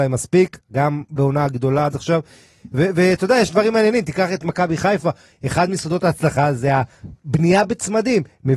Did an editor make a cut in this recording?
no; 0 cuts

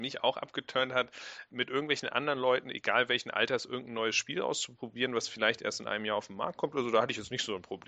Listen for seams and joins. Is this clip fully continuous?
no; 1 cut; at 1.5 s

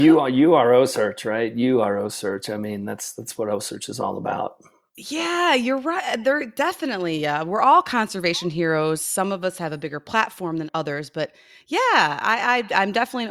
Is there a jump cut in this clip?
yes; 1 cut; at 10.7 s

